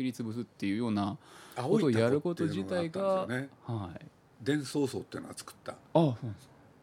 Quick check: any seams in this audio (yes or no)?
no